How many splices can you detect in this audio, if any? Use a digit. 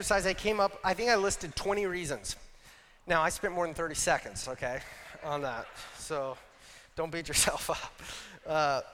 0